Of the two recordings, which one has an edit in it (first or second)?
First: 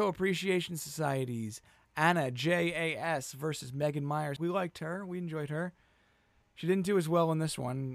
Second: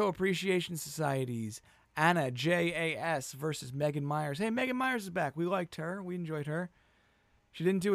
first